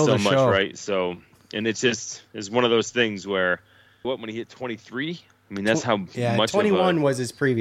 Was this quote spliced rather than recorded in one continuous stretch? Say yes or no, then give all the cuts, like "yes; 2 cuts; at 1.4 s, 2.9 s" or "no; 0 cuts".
yes; 1 cut; at 4.0 s